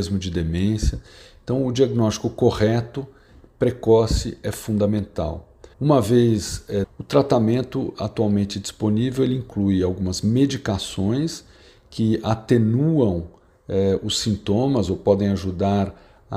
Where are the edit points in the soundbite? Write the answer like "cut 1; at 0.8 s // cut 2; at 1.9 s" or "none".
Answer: cut 1; at 5.7 s // cut 2; at 6.8 s